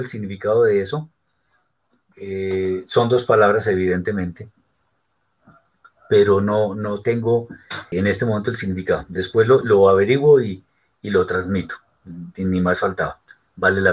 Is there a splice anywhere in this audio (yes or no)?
yes